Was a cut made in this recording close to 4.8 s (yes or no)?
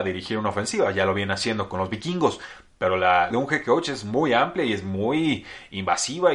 no